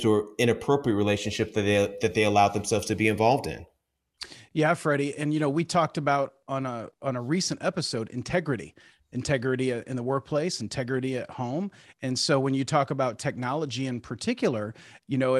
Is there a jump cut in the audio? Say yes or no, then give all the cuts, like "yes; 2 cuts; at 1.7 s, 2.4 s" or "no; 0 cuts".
no; 0 cuts